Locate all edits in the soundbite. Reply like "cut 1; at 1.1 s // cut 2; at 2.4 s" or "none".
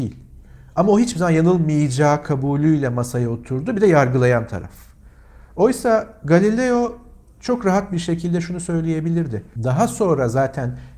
cut 1; at 9.6 s